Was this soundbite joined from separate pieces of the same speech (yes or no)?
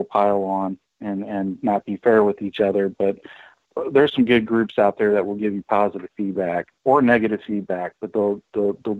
no